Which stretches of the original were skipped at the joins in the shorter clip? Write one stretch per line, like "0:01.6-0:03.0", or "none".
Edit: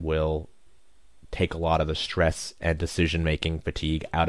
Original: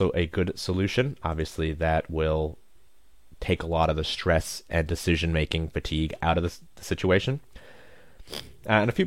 none